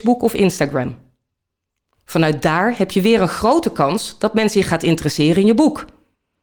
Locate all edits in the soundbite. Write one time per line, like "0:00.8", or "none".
none